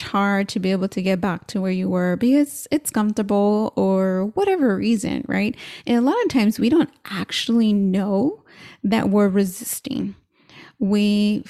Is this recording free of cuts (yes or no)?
yes